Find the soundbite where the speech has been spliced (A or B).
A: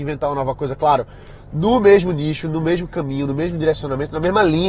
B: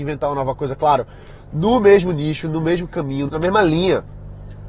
B